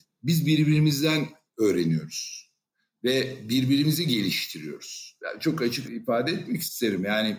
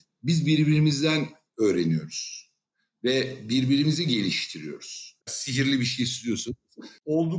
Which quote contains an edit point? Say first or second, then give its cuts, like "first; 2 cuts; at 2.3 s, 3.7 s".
second; 1 cut; at 5.2 s